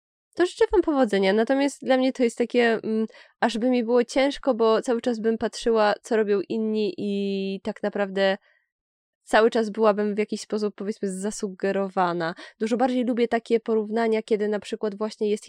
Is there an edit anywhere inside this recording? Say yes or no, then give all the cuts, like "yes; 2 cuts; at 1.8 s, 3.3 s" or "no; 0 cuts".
no; 0 cuts